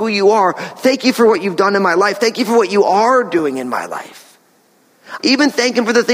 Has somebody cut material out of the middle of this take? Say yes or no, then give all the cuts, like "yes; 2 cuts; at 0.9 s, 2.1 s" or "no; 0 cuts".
yes; 1 cut; at 5.2 s